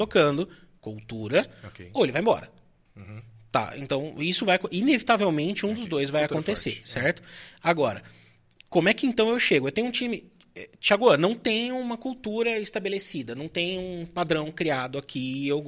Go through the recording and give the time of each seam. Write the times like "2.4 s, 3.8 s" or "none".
none

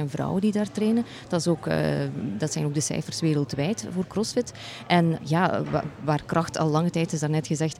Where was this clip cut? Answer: 5.2 s

